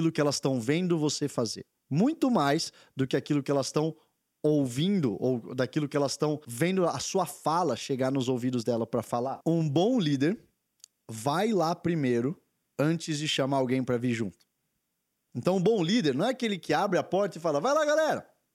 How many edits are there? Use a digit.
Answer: 0